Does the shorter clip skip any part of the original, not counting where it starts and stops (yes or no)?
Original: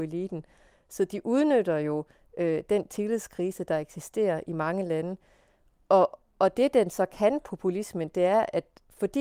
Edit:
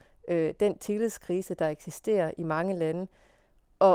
no